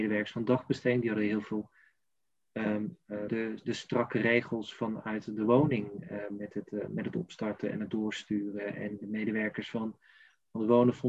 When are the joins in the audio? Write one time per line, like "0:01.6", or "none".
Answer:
0:03.3